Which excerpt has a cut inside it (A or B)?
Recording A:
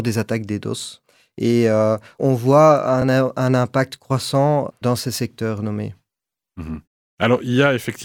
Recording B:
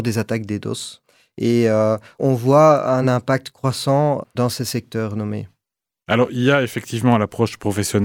B